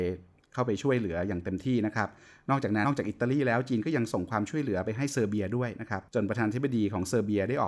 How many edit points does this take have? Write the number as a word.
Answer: two